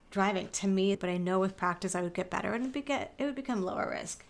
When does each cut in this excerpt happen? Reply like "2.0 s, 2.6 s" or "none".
0.9 s

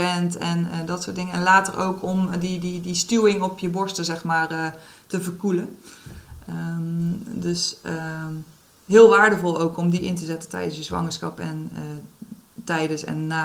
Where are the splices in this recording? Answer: none

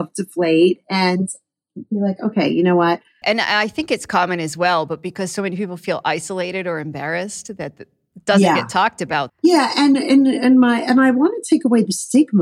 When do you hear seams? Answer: 3.2 s, 9.3 s

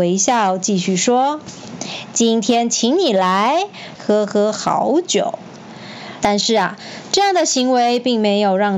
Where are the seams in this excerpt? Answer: 4.0 s, 6.2 s

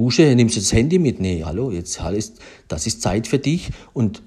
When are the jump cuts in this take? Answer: 1.4 s

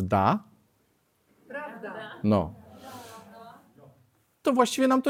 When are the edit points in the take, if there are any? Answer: none

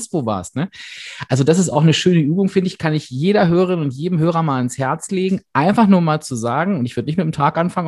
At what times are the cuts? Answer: none

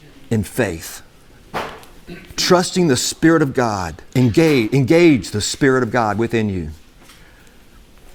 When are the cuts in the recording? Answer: 4.1 s

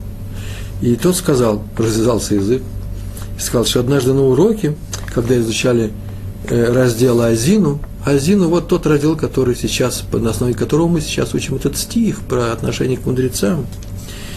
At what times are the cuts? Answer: none

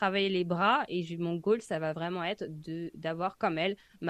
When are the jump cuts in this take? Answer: none

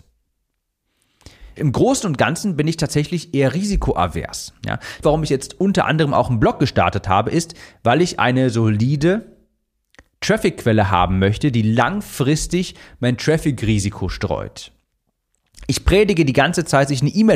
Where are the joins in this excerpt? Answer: 1.6 s, 5.0 s

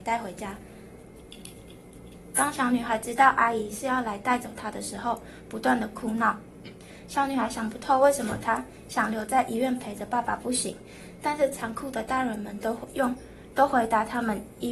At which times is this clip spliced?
none

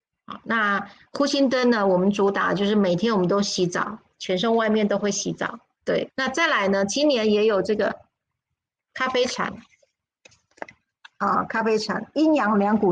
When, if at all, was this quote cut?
6.1 s

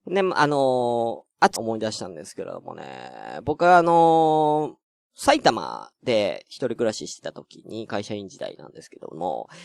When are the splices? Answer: 1.6 s

